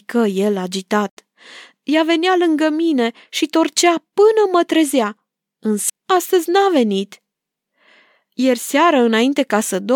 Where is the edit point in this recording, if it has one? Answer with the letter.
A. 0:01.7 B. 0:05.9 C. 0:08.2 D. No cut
B